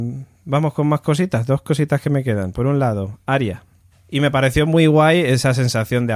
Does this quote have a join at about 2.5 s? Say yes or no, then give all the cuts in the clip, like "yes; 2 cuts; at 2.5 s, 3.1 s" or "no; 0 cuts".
no; 1 cut; at 3.9 s